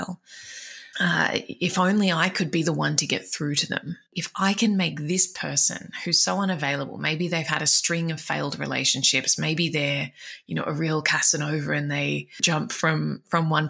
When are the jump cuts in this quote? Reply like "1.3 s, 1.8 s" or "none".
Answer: 0.9 s